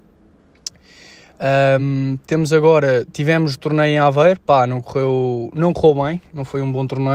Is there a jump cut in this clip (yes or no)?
no